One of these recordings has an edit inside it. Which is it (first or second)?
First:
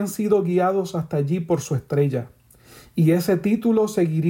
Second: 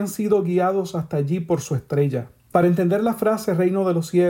second